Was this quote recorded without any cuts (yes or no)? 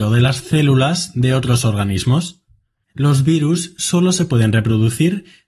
no